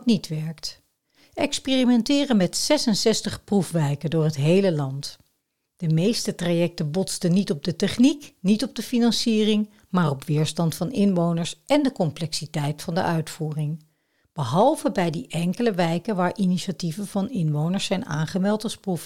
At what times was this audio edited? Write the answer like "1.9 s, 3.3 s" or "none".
5.7 s

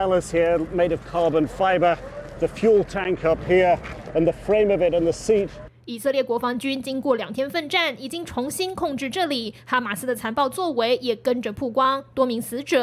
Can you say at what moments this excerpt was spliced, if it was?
none

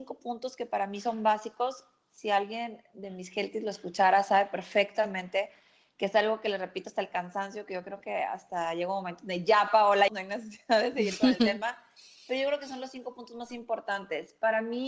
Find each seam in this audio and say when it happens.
10.1 s

